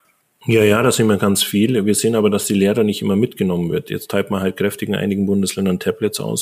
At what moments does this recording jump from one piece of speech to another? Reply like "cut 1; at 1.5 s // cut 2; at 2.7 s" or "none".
none